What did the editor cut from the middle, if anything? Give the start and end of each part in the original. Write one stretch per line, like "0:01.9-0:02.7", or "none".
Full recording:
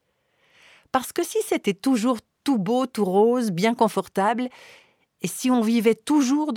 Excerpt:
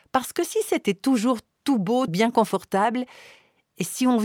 0:02.9-0:03.5

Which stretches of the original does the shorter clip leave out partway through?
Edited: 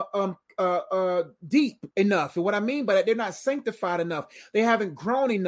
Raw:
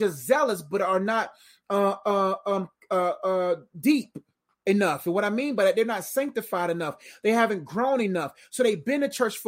0:04.2-0:04.6

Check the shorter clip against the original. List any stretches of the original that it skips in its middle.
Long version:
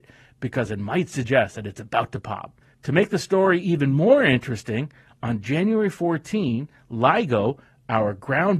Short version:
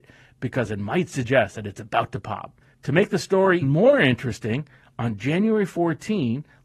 0:03.6-0:03.9

